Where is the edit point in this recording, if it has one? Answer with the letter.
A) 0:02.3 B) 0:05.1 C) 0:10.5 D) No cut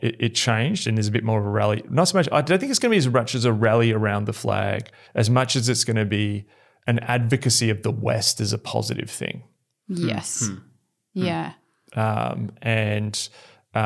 B